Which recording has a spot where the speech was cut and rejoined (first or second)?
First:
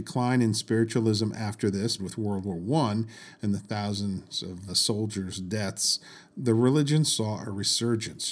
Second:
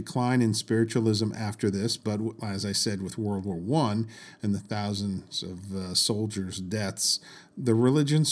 first